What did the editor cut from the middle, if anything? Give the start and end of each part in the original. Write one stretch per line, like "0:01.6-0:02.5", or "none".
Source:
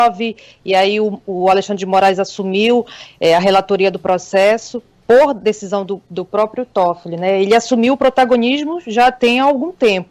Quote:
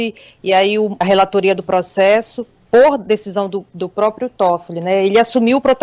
0:01.2-0:03.4